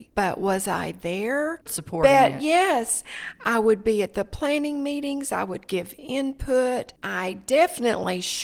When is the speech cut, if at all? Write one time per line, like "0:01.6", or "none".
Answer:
0:01.7